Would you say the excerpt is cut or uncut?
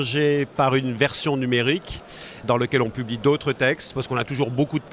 cut